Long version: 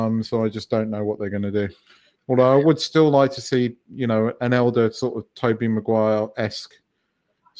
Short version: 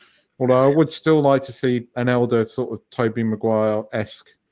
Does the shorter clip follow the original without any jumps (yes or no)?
no